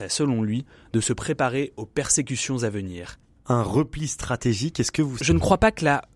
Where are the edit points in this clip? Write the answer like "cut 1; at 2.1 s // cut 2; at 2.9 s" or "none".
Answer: cut 1; at 3.4 s // cut 2; at 5.2 s